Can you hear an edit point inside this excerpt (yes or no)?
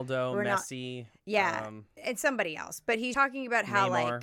yes